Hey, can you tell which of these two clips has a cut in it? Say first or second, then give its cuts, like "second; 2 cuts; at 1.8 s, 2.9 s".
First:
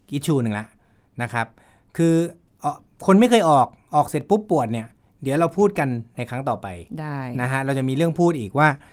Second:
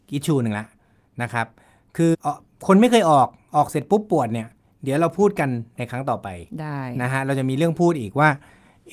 second; 1 cut; at 2.1 s